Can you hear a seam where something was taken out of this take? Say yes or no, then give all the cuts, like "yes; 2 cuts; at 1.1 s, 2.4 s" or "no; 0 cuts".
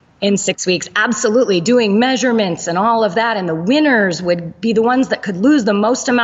no; 0 cuts